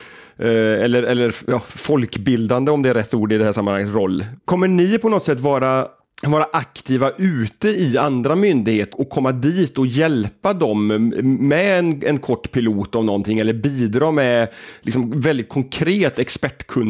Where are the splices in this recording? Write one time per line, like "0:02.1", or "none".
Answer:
0:04.4
0:08.9